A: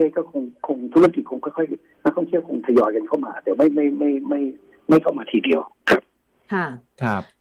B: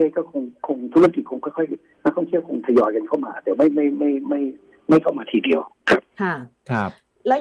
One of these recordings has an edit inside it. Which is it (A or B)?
B